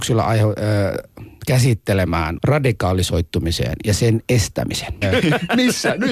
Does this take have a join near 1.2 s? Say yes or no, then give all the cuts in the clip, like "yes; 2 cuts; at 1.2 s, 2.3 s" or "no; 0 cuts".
no; 2 cuts; at 2.4 s, 5.0 s